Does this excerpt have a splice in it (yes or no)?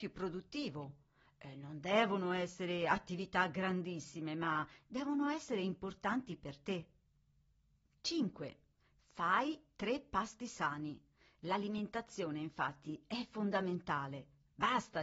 no